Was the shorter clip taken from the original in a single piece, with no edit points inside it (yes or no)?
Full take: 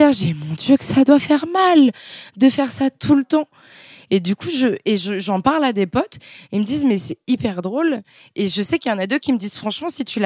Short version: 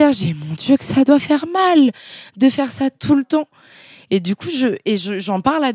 yes